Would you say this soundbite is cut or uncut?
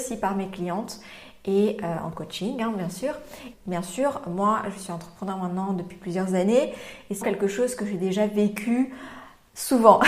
cut